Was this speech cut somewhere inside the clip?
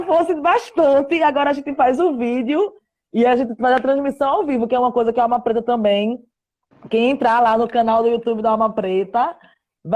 no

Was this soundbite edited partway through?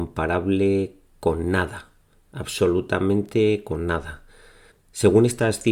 yes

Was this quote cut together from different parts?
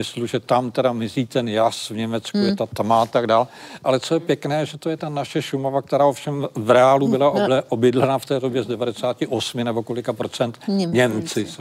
no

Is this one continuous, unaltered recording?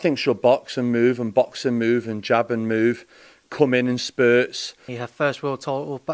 no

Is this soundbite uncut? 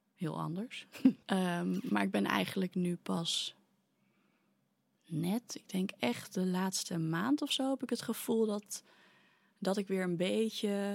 no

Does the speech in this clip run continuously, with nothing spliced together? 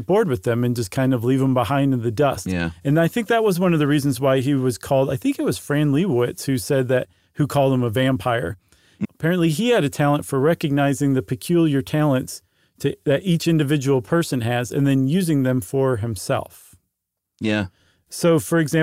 no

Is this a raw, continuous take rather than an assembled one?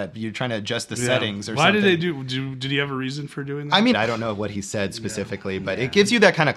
no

